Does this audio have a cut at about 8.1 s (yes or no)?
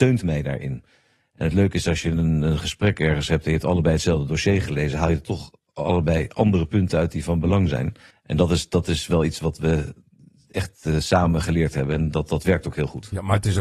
yes